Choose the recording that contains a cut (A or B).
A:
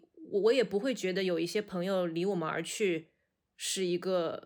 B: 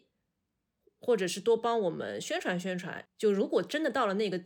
B